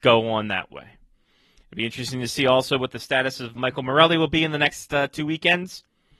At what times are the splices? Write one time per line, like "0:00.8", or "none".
0:03.6